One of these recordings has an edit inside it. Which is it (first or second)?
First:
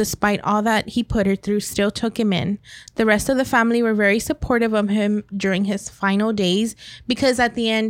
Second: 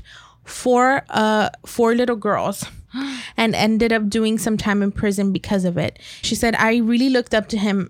second